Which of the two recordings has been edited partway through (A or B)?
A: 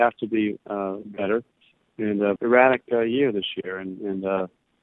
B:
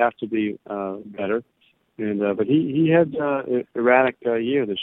A